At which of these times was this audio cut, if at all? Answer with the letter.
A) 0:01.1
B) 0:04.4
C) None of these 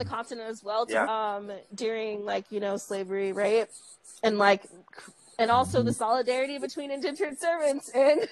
A